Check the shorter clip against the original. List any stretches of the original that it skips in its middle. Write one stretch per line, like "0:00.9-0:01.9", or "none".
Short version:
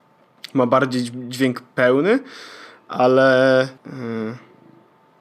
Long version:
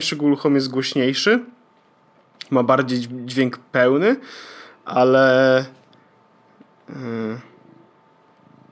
0:05.7-0:06.8

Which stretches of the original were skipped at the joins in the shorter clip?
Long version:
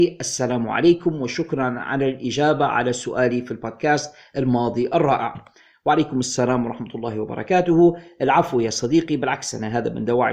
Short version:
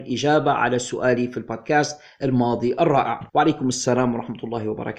0:05.4-0:05.8

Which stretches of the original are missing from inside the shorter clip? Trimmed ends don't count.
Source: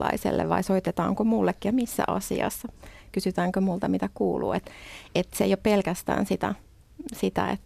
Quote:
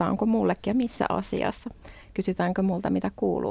none

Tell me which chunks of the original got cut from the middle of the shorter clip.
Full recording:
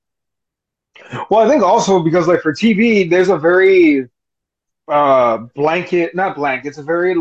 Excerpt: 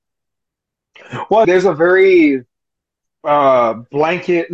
0:01.4-0:03.1

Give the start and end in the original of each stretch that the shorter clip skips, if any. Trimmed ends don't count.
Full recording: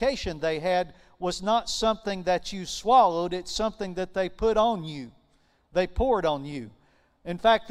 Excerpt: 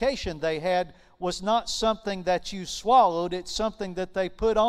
none

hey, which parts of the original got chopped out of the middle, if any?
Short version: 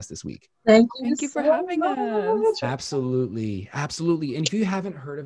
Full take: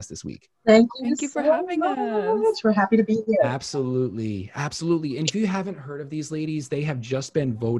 0:02.6-0:03.4

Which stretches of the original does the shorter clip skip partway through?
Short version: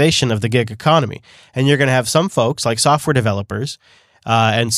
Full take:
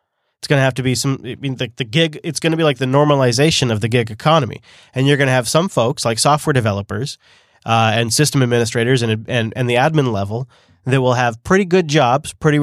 none

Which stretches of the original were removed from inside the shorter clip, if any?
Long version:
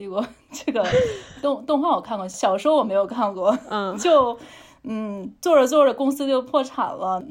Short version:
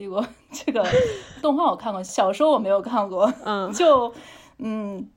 0:01.4-0:01.7

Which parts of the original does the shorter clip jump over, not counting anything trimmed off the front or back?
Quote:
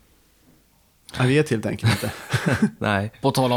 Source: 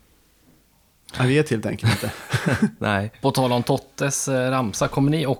none

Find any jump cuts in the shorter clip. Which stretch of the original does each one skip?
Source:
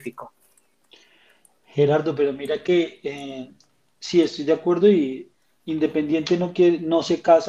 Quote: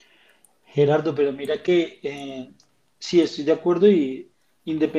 none

